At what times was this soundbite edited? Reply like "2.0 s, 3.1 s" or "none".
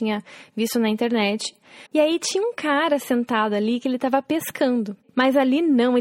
1.9 s, 5.0 s